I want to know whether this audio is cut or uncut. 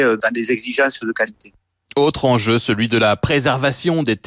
uncut